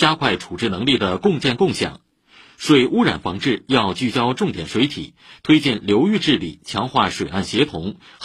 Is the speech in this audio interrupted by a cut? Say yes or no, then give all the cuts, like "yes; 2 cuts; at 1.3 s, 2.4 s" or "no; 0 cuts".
no; 0 cuts